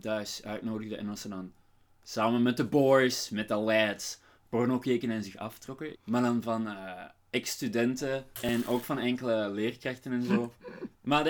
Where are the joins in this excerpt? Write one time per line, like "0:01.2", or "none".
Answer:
0:05.9
0:08.3